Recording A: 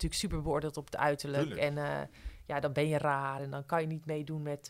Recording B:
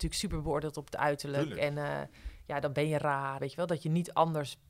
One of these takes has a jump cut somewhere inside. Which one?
B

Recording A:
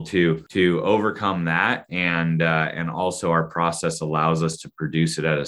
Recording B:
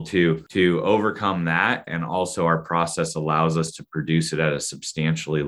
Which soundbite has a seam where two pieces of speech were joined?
B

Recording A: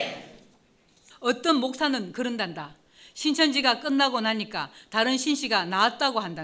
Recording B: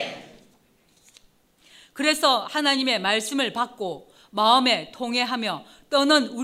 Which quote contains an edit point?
A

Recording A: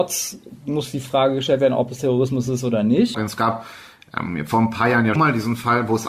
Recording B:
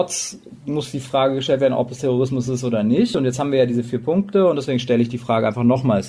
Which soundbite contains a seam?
A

